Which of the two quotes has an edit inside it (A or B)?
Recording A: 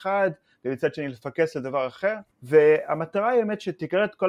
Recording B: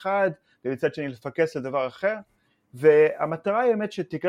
A